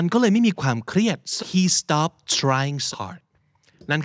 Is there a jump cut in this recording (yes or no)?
yes